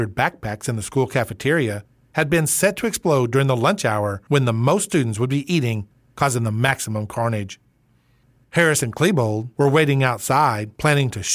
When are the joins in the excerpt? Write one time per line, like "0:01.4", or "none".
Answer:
none